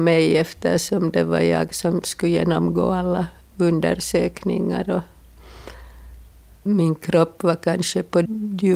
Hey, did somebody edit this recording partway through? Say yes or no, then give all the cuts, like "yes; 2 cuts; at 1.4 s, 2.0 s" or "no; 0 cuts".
no; 0 cuts